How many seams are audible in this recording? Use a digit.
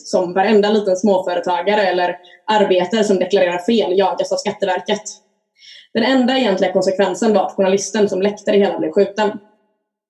0